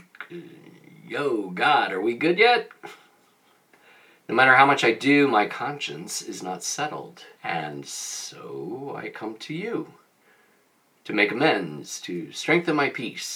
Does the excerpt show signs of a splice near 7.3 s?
yes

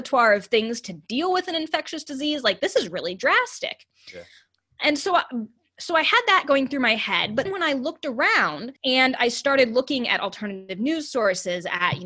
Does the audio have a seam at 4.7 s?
no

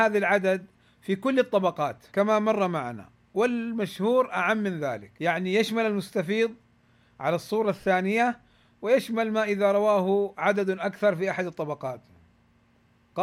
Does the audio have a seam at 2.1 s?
yes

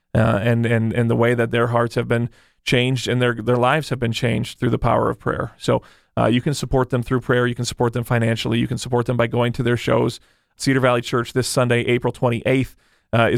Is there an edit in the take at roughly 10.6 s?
yes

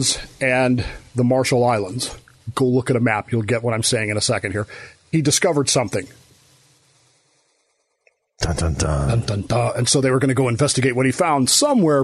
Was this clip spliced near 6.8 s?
no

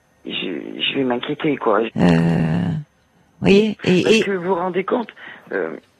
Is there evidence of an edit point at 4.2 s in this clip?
no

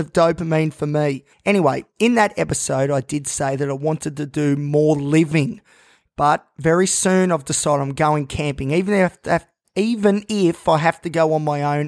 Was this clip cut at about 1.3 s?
yes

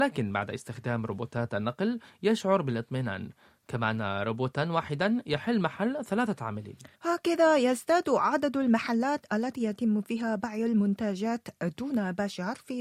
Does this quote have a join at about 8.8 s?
no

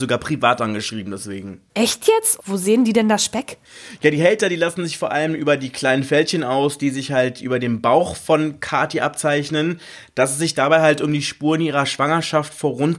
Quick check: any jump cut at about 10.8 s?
no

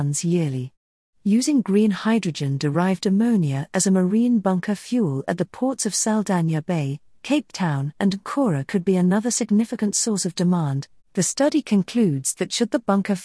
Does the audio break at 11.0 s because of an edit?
yes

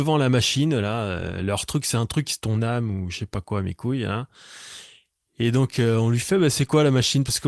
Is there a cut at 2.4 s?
yes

